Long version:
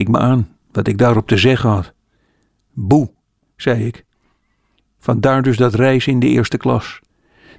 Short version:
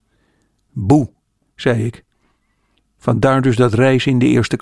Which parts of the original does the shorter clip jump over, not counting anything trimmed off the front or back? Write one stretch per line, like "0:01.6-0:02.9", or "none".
none